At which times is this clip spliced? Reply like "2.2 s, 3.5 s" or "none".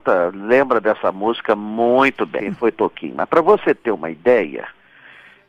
2.4 s